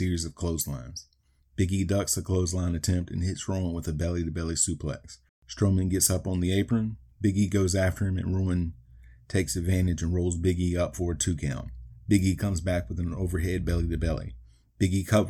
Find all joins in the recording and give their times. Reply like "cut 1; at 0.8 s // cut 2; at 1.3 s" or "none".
cut 1; at 5.3 s